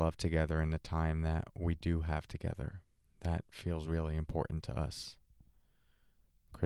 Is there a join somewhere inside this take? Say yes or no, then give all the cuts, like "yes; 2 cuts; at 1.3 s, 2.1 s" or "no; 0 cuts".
no; 0 cuts